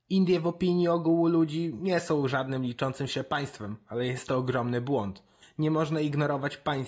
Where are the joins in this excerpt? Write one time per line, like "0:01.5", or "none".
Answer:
0:05.4